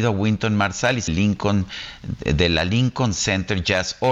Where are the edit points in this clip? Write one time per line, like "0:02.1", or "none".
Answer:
0:01.1